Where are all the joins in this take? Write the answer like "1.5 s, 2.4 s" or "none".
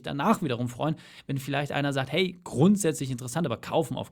none